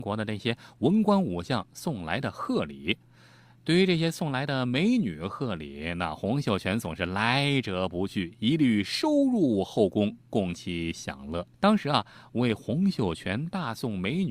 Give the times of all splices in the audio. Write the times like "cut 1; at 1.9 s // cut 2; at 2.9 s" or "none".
cut 1; at 11.5 s